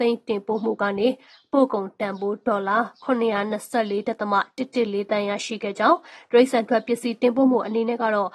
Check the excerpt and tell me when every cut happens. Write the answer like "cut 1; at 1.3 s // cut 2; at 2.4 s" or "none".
none